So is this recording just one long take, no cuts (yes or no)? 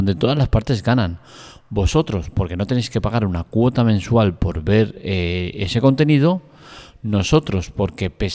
yes